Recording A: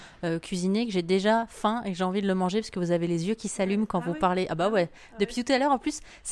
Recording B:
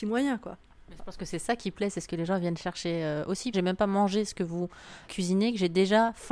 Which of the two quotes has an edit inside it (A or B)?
B